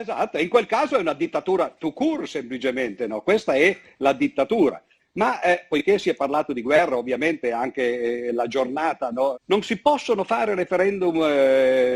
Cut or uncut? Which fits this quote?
cut